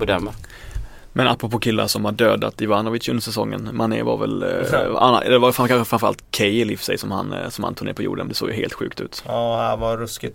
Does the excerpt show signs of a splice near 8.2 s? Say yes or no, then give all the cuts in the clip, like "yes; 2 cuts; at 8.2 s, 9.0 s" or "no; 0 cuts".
yes; 1 cut; at 8.2 s